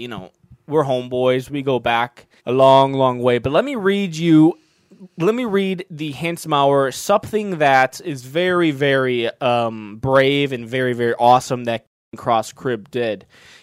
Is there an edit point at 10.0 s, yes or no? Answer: no